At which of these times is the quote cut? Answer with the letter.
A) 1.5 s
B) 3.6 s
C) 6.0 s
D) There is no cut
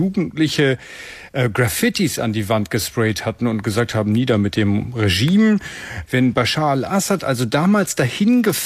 C